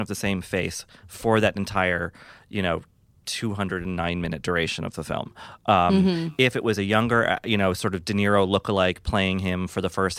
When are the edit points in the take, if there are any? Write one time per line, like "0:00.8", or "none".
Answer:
none